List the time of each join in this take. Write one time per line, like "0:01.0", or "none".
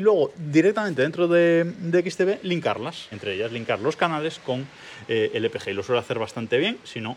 0:03.1